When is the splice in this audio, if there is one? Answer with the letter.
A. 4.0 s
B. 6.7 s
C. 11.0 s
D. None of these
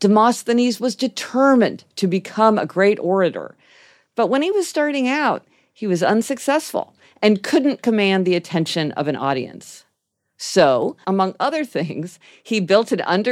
C